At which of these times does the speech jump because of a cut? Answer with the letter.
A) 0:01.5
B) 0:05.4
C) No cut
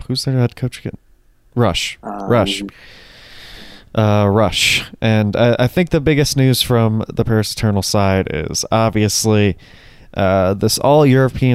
C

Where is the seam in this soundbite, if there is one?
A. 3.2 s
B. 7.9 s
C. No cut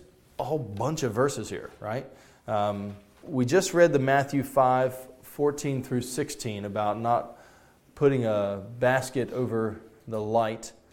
A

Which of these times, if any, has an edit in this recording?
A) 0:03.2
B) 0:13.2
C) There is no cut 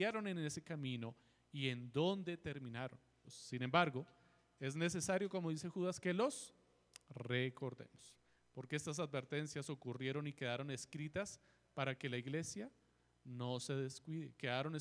A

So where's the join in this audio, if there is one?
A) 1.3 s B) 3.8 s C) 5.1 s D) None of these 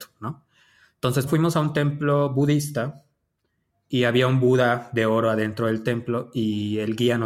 A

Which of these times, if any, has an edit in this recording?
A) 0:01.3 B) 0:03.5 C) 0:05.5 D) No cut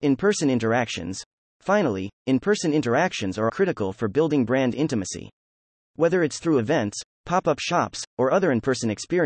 B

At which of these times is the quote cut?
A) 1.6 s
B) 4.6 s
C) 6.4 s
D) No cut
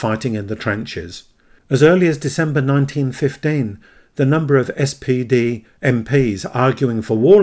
A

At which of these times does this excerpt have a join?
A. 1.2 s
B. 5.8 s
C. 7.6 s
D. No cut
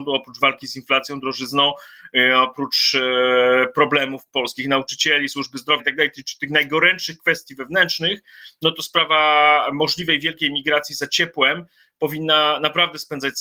B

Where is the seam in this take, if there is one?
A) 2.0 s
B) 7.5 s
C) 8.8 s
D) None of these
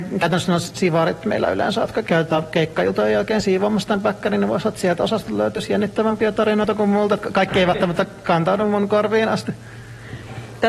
A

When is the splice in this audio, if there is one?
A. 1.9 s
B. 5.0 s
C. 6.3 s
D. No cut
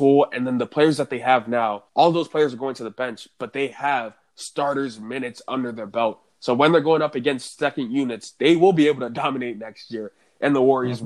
A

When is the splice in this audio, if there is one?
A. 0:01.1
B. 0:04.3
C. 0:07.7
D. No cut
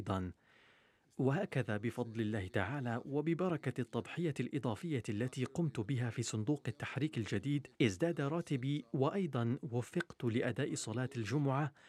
C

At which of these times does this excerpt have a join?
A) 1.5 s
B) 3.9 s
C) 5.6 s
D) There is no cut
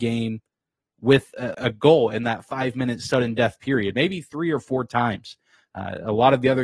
A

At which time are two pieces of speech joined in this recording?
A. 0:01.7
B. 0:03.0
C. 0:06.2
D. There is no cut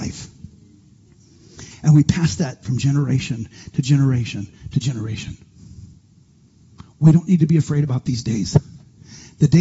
A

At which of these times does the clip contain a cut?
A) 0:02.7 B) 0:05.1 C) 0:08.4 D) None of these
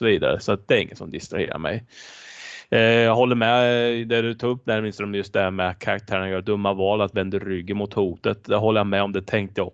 D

